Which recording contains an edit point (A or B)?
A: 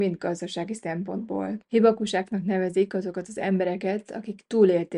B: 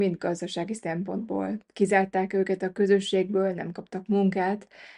A